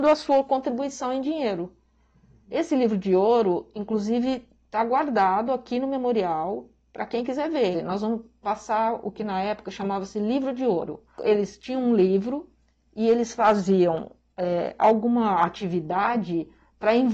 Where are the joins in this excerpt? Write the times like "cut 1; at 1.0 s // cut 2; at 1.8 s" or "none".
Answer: cut 1; at 7.7 s // cut 2; at 11.1 s